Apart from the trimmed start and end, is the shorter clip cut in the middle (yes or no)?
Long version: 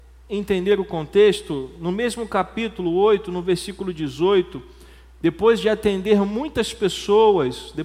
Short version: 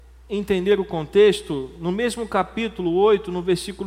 no